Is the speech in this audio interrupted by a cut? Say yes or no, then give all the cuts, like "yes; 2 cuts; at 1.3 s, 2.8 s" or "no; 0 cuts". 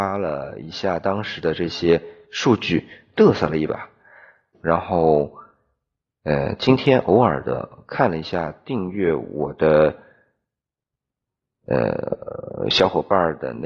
yes; 1 cut; at 4.5 s